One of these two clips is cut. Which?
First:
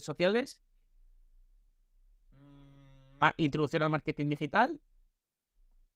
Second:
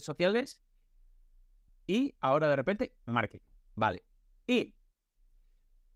second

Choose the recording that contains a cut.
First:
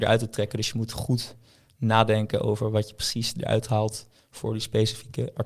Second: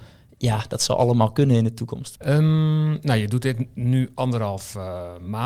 second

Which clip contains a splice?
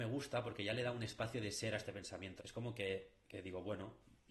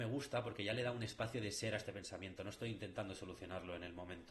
first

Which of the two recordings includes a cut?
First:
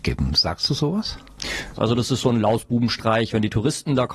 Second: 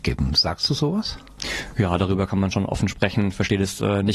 first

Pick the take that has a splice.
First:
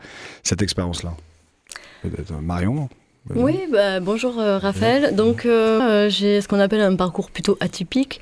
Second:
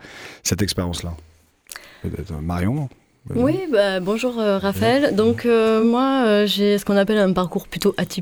first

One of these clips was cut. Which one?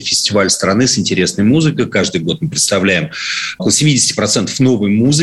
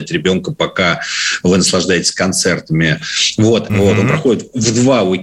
second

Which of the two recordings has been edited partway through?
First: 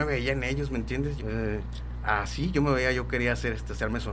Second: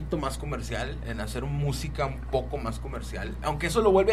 first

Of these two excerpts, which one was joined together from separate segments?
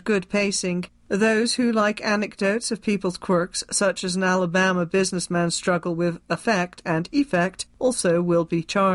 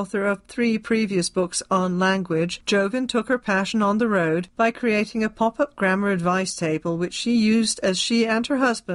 first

